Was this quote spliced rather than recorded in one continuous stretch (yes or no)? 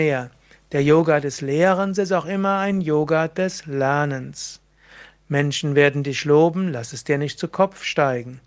yes